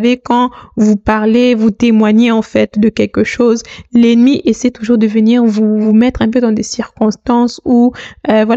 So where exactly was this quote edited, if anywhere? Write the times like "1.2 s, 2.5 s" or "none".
none